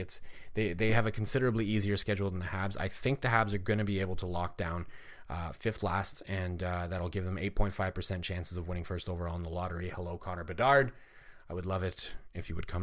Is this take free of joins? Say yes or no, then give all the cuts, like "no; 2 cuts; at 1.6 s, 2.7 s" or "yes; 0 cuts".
yes; 0 cuts